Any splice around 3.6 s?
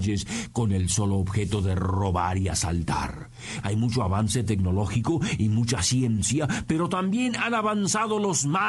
yes; 1 cut; at 3.6 s

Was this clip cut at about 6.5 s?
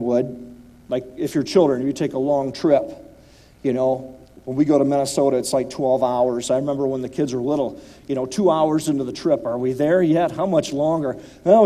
no; 0 cuts

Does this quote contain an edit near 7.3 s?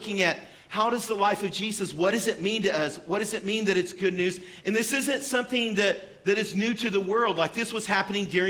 no; 1 cut; at 4.6 s

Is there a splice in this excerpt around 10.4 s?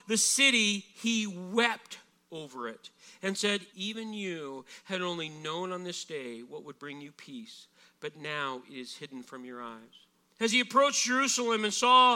yes; 2 cuts; at 3.7 s, 10.4 s

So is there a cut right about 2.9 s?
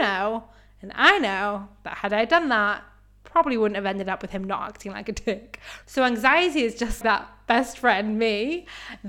no; 2 cuts; at 5.8 s, 7.0 s

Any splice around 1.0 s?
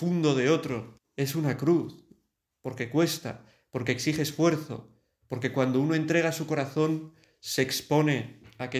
yes; 1 cut; at 1.0 s

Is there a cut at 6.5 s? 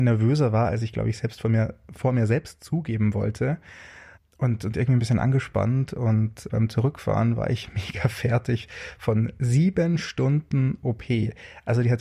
yes; 1 cut; at 6.5 s

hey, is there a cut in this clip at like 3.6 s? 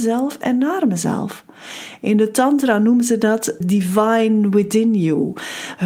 yes; 1 cut; at 3.6 s

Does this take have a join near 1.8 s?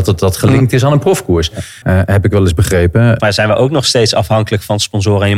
yes; 2 cuts; at 1.8 s, 3.2 s

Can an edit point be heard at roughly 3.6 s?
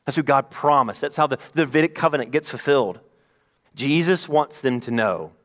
yes; 1 cut; at 3.6 s

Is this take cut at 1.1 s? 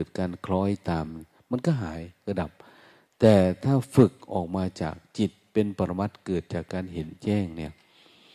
no; 0 cuts

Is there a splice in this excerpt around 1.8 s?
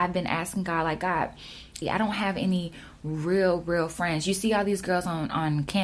yes; 1 cut; at 1.8 s

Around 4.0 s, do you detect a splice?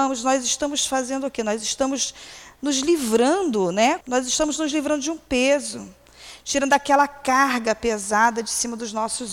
yes; 1 cut; at 4.0 s

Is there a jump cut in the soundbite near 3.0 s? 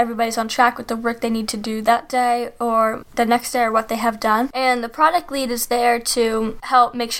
yes; 1 cut; at 3.0 s

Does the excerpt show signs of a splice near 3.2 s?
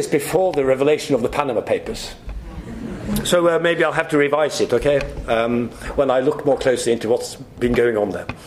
no; 0 cuts

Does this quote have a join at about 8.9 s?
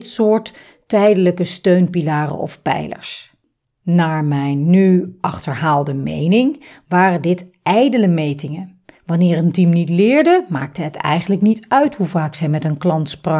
no; 0 cuts

